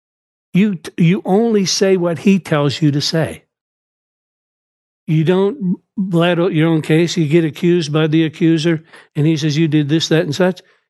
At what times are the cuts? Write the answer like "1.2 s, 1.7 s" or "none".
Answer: none